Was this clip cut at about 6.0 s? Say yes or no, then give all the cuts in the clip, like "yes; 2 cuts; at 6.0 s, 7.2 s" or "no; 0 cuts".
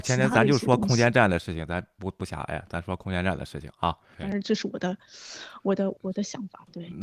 yes; 2 cuts; at 4.1 s, 6.0 s